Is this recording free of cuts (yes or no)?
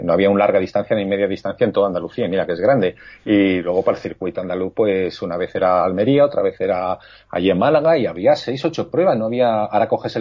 yes